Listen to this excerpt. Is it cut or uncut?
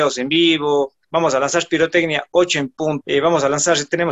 cut